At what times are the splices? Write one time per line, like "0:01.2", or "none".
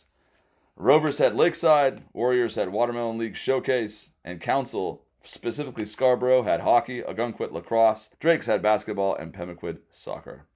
0:08.1